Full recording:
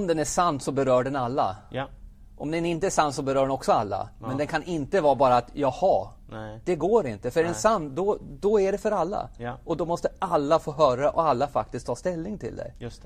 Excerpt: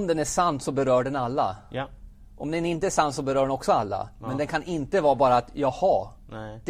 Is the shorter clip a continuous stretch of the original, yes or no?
yes